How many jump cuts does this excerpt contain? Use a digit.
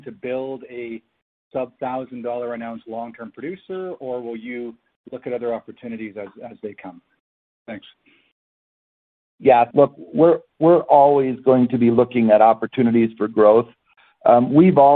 1